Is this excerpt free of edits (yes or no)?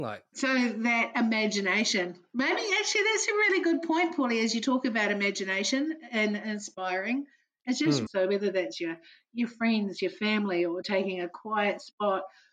no